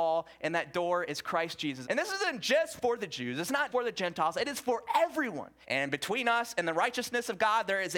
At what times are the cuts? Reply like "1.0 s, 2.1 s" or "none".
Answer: 1.8 s, 3.7 s, 5.6 s